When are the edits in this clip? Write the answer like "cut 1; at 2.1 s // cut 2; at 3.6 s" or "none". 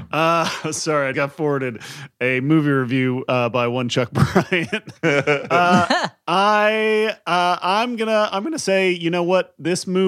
cut 1; at 1.1 s